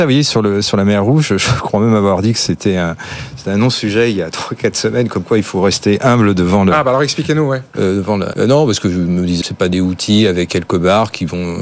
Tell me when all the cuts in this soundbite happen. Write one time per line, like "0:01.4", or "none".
0:08.3
0:09.4